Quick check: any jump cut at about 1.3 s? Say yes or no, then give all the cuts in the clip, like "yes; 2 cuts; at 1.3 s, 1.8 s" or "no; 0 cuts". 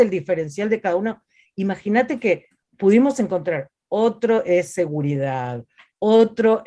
no; 2 cuts; at 2.6 s, 3.8 s